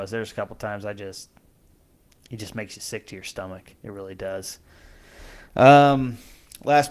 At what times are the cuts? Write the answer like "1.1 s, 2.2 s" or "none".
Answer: none